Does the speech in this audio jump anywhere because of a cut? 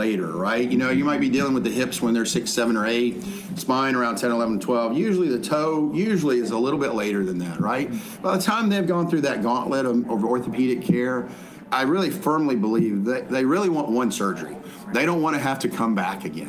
no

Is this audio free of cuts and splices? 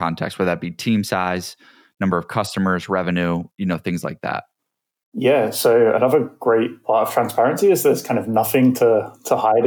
yes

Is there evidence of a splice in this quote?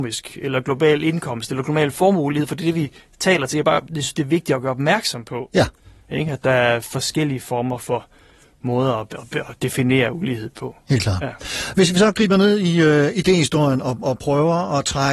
no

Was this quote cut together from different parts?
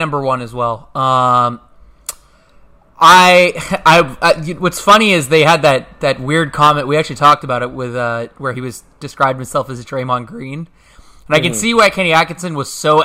no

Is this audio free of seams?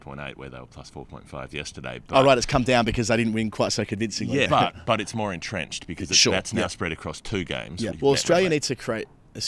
no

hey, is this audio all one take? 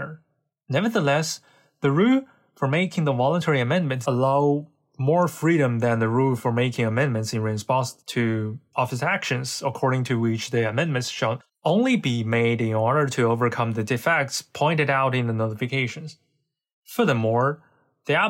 no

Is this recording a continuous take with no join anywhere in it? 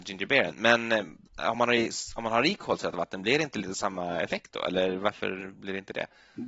yes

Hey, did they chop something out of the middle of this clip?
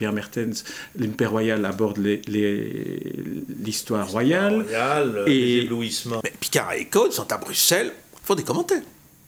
yes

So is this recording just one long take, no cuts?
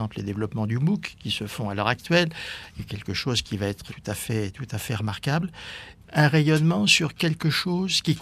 no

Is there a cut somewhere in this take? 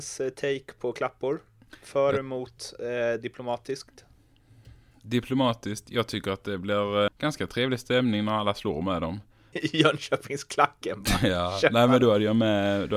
yes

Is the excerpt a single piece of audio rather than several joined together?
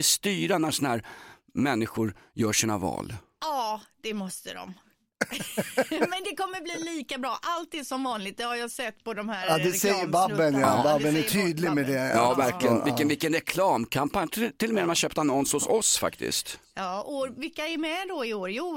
yes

